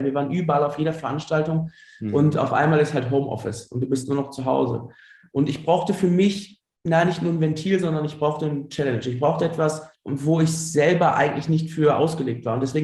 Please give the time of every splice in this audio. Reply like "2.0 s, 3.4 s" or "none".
none